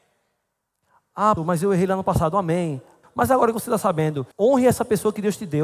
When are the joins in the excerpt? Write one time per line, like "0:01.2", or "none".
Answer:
0:01.4
0:03.0
0:04.3